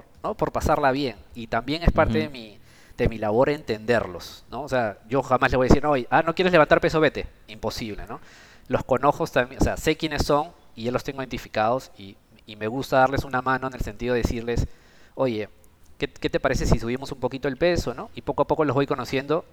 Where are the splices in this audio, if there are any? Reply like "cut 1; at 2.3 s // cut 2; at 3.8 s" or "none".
none